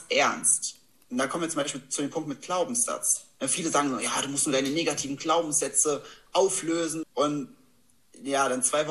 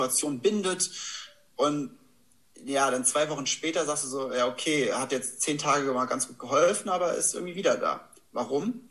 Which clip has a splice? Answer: first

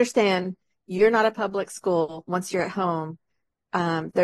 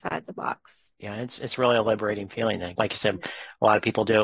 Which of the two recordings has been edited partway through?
second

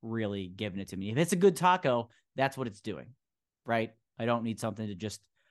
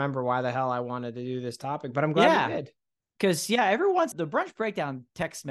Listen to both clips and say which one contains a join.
second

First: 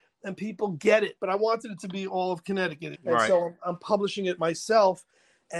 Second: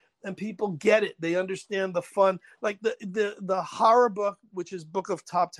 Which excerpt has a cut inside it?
first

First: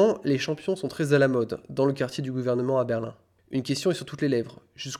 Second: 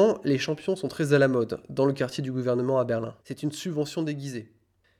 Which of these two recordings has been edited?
second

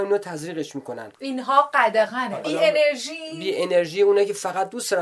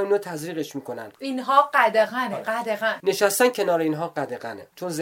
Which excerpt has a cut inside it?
first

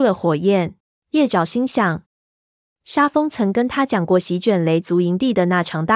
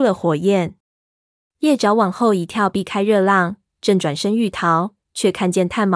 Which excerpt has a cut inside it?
first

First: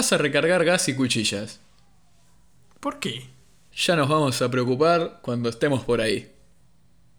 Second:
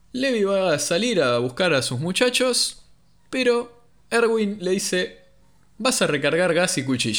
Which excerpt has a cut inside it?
first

